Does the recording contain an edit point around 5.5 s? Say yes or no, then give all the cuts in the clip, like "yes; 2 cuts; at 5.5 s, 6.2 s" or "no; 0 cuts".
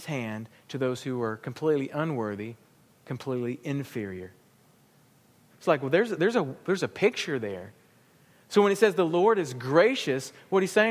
yes; 1 cut; at 5.5 s